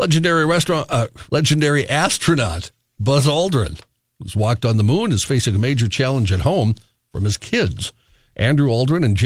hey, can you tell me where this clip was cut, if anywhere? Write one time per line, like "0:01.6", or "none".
0:01.3